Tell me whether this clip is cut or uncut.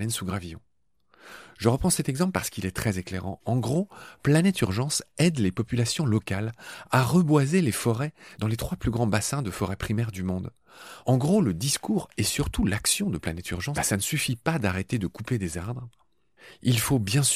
cut